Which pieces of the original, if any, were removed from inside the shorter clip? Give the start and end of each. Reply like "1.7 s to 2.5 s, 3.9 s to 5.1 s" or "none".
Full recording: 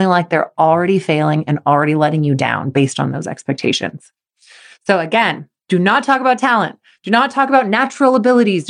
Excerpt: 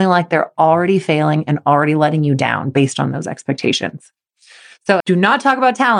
5.0 s to 5.6 s